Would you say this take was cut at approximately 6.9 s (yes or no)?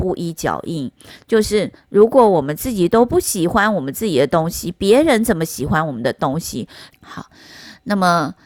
yes